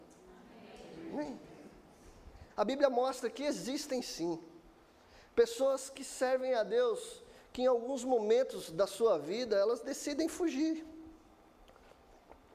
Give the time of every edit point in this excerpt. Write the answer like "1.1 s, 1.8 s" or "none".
2.5 s